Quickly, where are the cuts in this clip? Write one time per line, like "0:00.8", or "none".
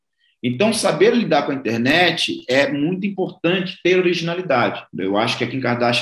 0:04.9